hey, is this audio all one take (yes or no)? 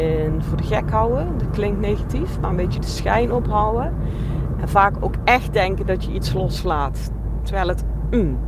yes